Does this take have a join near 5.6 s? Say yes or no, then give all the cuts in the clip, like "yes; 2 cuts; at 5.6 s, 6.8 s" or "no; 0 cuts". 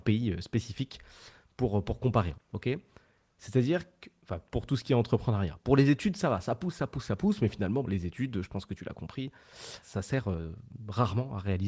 no; 3 cuts; at 2.3 s, 7.8 s, 9.8 s